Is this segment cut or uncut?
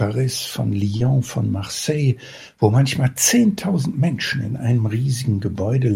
uncut